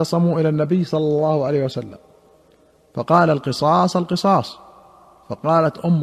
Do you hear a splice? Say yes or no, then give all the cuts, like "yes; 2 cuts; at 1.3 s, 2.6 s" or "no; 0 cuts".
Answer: no; 0 cuts